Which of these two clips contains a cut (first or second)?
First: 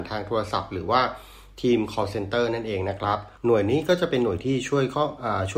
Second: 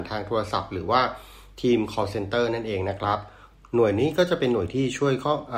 first